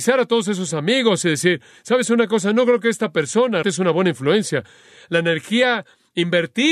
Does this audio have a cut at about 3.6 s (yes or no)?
yes